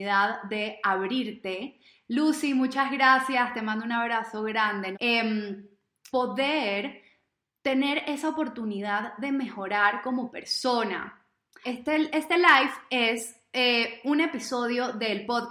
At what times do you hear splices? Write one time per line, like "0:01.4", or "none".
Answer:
0:04.9
0:06.1
0:11.6